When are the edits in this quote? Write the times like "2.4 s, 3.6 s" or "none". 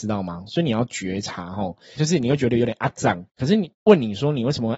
2.0 s, 3.3 s